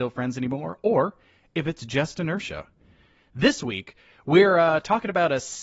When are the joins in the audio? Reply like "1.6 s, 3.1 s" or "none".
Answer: none